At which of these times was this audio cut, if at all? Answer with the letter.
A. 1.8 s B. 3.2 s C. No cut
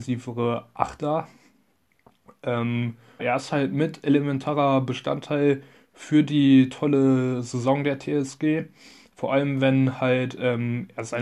B